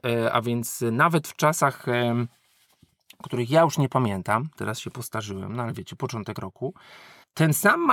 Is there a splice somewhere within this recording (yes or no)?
no